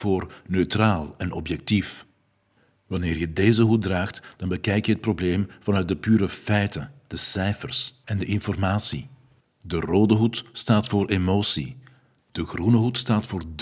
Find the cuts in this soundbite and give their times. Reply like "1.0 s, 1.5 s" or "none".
12.2 s